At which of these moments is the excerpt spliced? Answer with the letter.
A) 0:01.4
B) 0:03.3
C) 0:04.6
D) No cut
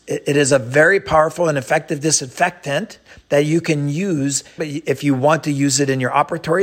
C